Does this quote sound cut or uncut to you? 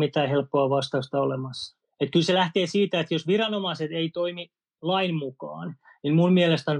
cut